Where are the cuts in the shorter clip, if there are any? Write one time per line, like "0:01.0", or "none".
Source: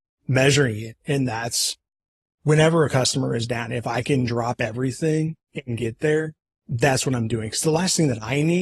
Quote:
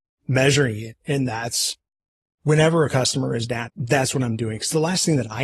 0:03.7